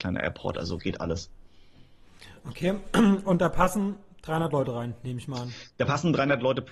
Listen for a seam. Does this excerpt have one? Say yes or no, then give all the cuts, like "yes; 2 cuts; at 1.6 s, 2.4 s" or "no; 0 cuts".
yes; 1 cut; at 5.7 s